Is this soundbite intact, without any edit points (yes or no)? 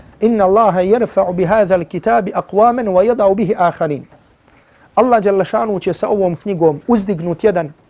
yes